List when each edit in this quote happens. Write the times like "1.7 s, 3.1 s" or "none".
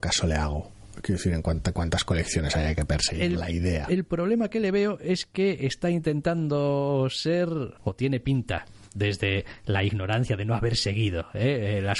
7.8 s

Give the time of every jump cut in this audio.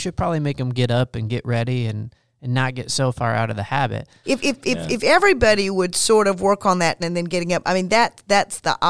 4.2 s, 7.0 s

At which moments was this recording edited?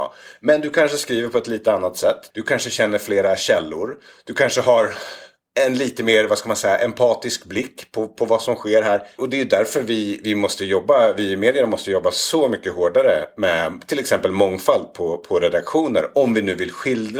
2.3 s, 9.2 s

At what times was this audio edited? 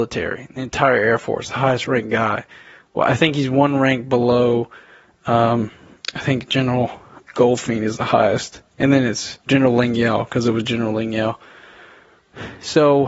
7.2 s, 9.4 s

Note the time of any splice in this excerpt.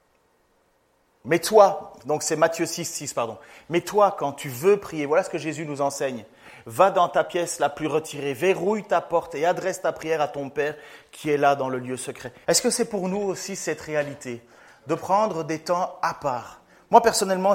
12.4 s

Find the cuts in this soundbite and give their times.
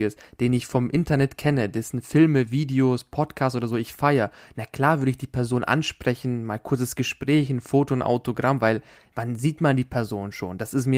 none

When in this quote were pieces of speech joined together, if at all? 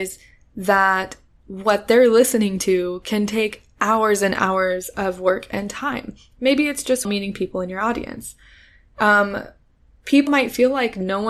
7.0 s, 10.3 s

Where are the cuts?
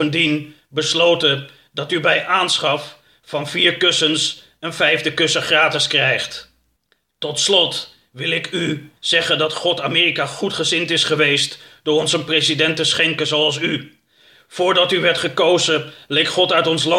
9.0 s

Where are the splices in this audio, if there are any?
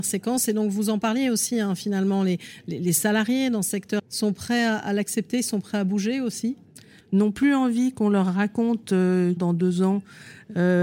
4.0 s, 7.0 s, 9.4 s

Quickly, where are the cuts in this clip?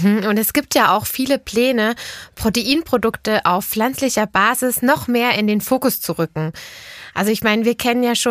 none

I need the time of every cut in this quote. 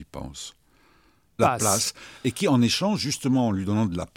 1.4 s

